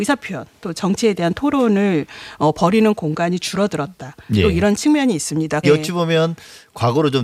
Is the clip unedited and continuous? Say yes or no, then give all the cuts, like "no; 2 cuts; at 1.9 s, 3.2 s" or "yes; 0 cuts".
no; 1 cut; at 5.6 s